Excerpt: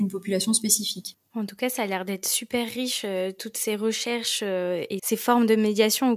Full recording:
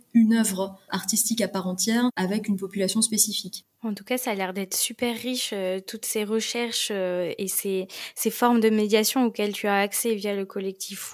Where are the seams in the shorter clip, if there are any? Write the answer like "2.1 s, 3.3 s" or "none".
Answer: 5.0 s